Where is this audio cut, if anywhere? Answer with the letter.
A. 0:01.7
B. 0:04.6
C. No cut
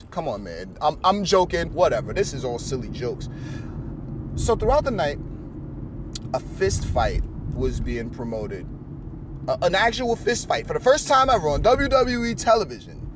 A